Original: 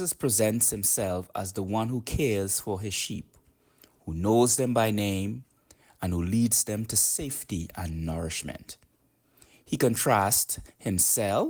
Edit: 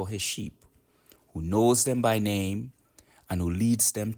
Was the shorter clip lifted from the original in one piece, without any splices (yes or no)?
yes